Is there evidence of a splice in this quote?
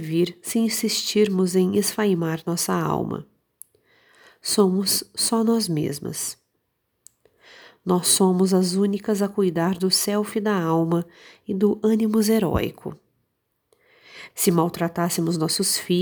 yes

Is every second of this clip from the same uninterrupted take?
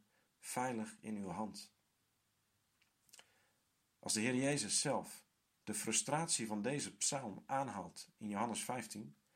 no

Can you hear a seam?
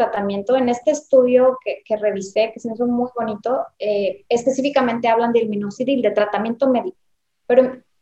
no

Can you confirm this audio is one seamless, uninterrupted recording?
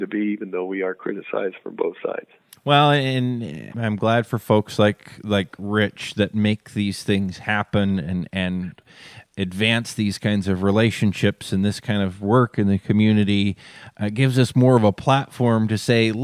no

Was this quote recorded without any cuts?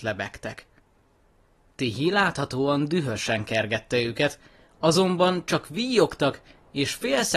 yes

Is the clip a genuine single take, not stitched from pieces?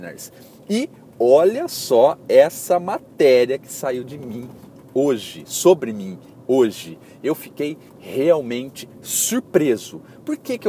yes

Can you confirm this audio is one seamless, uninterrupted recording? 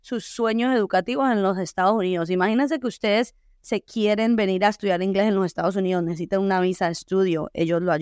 yes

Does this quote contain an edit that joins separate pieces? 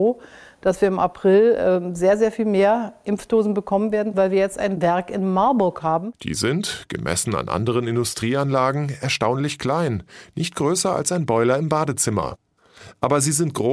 yes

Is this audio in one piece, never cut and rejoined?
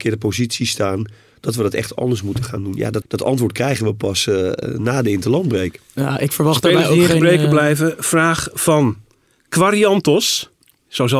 no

